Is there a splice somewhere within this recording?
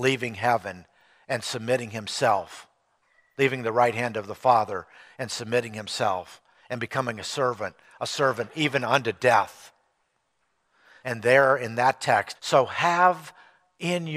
yes; 2 cuts; at 11.0 s, 12.3 s

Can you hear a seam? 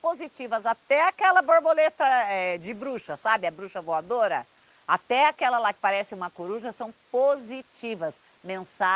no; 0 cuts

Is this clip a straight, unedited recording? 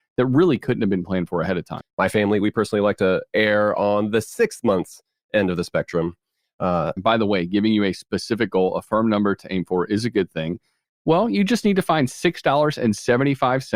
no; 3 cuts; at 1.8 s, 7.0 s, 10.8 s

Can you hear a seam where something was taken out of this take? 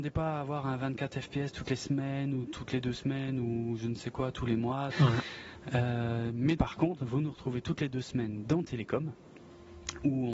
yes; 2 cuts; at 4.9 s, 6.6 s

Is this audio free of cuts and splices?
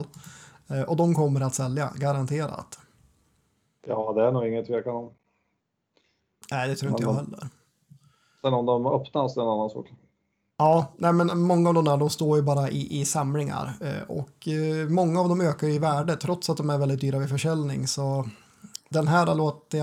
yes; 0 cuts

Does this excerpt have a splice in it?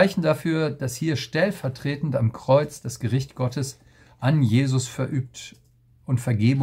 no; 0 cuts

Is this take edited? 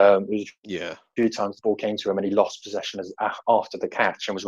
no; 0 cuts

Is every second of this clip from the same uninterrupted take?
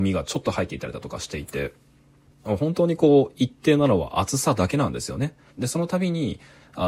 no; 1 cut; at 5.5 s

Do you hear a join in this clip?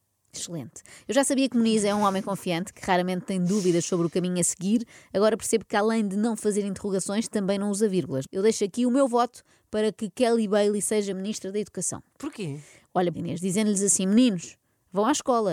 yes; 2 cuts; at 8.2 s, 13.1 s

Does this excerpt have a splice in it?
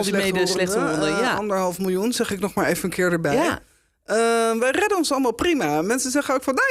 no; 0 cuts

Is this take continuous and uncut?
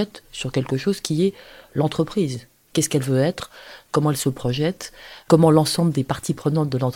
yes; 0 cuts

